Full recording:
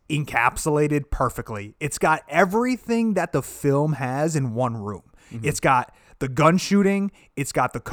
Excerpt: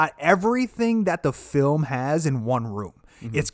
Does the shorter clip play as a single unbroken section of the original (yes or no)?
yes